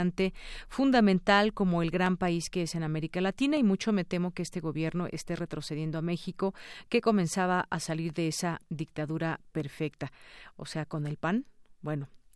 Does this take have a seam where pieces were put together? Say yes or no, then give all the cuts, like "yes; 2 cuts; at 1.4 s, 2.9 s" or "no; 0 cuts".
no; 0 cuts